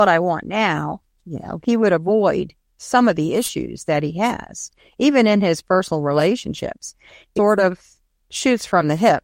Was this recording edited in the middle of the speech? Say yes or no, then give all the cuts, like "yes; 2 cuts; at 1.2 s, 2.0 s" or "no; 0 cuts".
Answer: yes; 1 cut; at 7.4 s